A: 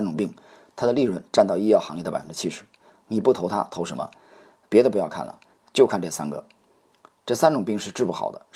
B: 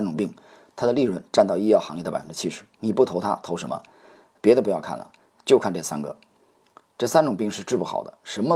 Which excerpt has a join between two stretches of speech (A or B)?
B